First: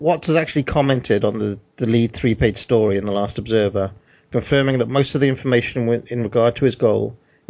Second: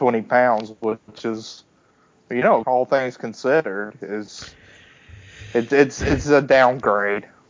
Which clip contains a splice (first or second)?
second